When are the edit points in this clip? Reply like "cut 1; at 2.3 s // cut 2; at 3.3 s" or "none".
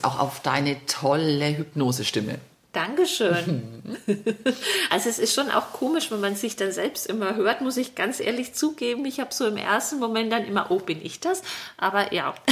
none